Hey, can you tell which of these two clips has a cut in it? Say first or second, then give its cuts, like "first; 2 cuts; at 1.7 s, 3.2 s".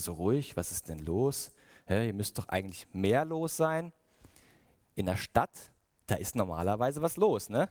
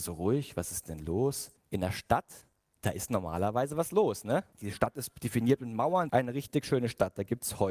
second; 3 cuts; at 1.6 s, 4.5 s, 6.1 s